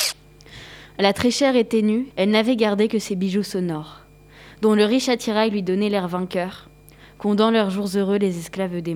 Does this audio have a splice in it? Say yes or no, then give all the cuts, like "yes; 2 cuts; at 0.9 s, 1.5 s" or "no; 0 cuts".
yes; 1 cut; at 2.1 s